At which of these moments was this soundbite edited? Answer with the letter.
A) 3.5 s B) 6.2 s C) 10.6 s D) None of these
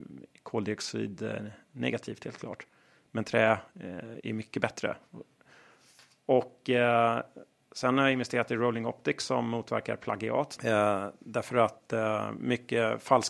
C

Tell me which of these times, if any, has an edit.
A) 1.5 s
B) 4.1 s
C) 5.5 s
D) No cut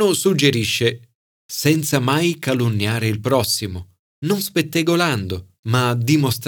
B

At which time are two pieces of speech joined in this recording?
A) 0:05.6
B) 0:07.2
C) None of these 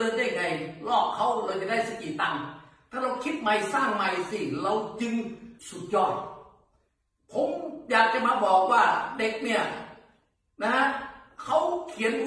A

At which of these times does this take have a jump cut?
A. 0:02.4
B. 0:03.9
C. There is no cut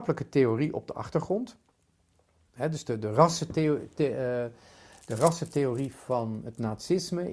A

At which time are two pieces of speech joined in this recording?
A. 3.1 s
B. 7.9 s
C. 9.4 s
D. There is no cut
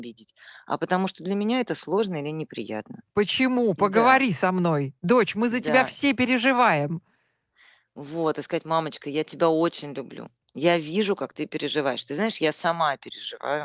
A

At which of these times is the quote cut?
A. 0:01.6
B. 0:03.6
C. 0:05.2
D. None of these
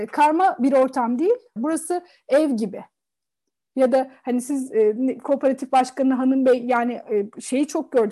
A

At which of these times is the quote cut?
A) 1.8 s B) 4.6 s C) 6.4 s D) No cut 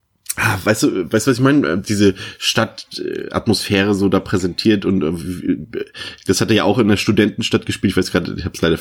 A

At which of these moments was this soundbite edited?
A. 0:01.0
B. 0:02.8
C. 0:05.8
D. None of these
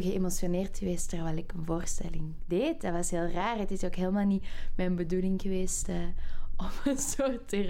D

